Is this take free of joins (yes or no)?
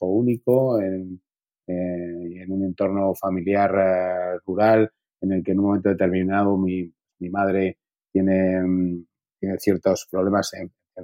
yes